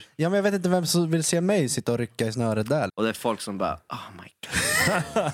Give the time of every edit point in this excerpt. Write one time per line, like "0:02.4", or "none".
0:02.9